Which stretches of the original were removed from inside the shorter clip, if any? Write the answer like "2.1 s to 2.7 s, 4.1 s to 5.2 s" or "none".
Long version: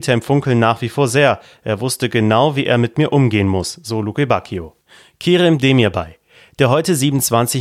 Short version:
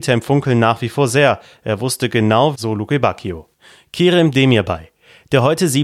2.5 s to 3.8 s